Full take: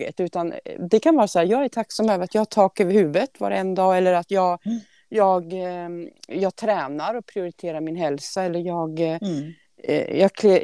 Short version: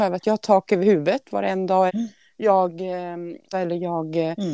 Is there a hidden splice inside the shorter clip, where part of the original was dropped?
yes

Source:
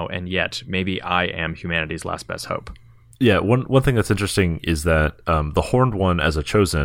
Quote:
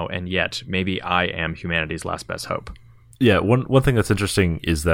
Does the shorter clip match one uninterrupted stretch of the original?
yes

